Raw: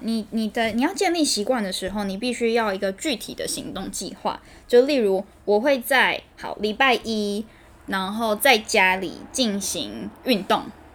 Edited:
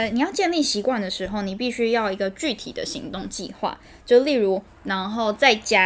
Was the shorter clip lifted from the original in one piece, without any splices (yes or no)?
no